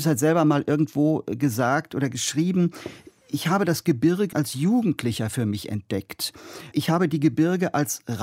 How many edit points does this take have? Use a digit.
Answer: 2